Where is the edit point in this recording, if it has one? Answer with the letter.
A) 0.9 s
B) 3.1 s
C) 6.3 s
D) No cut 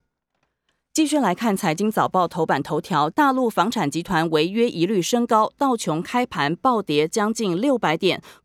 B